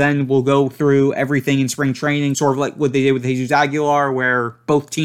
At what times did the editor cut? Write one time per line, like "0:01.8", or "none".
none